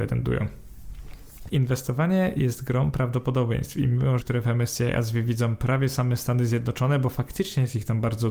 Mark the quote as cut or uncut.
cut